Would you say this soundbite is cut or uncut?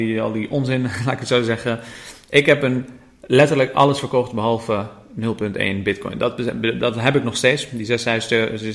uncut